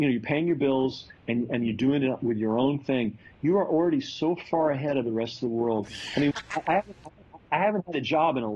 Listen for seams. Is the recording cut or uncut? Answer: cut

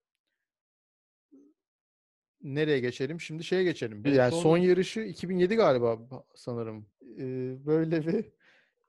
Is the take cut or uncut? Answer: cut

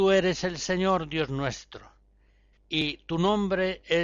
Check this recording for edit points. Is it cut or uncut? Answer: cut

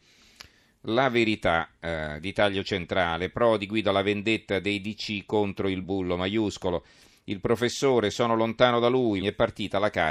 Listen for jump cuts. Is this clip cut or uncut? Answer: cut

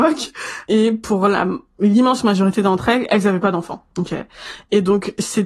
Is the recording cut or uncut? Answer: uncut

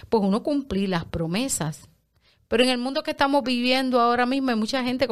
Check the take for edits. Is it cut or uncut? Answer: uncut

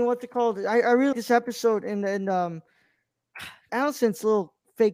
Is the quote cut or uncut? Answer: cut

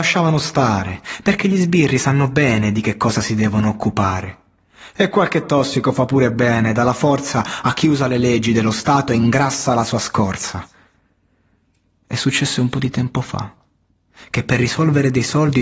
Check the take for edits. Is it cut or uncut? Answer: uncut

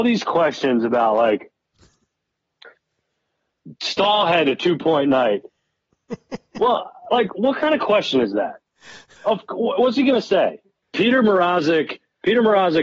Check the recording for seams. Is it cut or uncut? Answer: cut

